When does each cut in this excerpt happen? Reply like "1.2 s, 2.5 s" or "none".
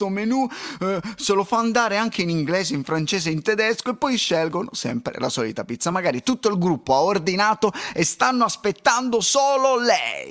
none